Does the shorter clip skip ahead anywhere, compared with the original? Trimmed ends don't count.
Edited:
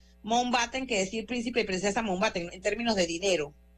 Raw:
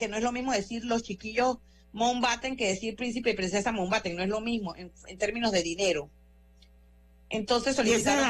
yes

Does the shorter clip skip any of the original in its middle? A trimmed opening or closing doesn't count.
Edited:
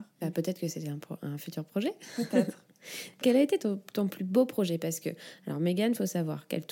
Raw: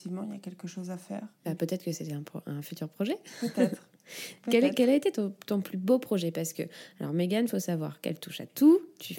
yes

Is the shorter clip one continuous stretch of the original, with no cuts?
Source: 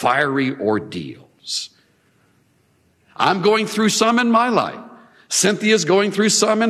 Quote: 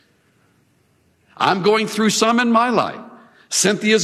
yes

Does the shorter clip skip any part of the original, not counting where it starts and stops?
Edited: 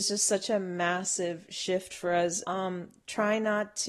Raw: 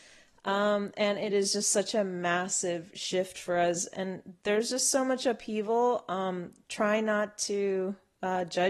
yes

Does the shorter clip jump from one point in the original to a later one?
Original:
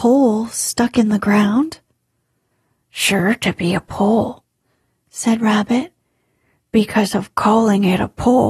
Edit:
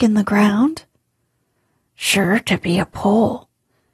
no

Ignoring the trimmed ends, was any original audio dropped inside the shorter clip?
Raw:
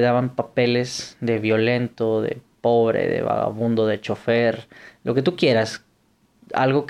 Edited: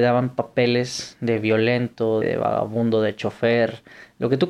yes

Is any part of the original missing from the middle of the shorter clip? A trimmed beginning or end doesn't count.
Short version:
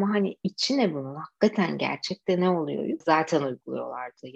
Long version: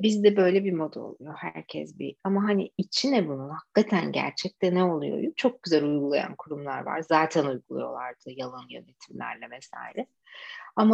yes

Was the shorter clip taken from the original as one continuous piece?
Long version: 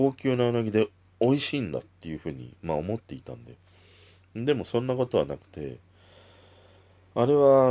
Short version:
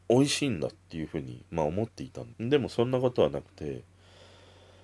no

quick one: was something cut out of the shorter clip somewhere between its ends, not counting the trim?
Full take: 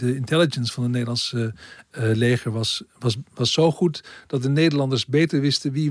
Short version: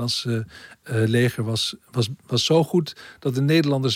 no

